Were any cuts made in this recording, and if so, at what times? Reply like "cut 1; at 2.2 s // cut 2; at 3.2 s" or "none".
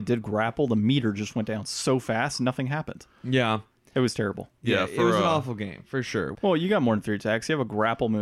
cut 1; at 6.3 s